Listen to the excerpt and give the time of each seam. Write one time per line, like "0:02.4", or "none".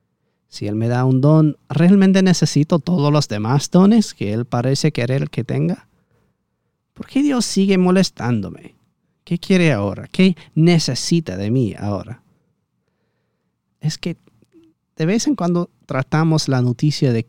0:13.7